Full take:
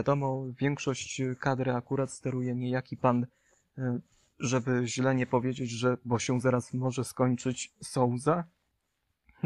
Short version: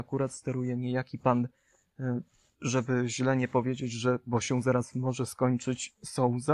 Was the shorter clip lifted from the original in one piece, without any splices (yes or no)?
yes